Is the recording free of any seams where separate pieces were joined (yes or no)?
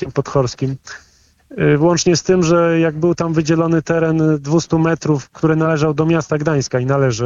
yes